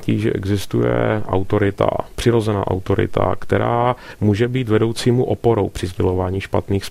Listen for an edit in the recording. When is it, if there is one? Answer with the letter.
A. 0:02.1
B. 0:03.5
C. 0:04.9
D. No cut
D